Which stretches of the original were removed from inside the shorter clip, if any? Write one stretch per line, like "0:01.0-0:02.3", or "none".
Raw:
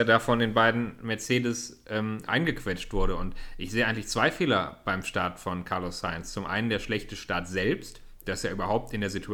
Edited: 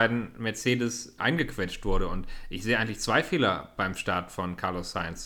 0:01.8-0:02.3